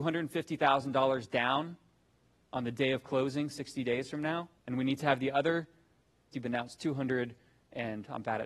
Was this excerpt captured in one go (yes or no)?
no